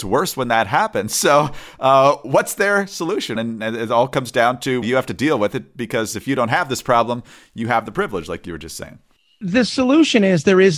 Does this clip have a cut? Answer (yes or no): yes